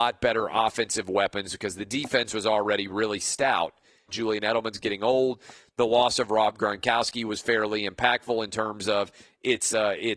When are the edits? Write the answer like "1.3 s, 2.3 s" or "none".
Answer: 4.1 s